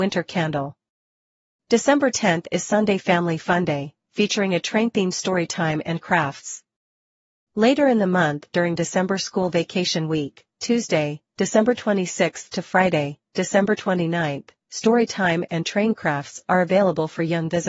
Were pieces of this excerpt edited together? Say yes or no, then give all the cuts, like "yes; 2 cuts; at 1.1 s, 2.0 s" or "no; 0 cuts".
no; 0 cuts